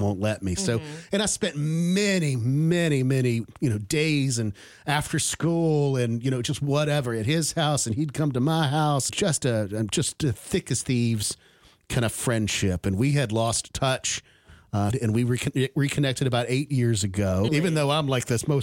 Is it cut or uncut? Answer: cut